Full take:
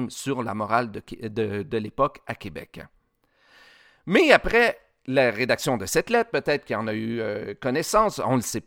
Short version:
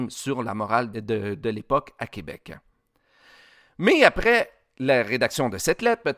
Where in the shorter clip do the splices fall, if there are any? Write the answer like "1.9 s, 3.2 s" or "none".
0.9 s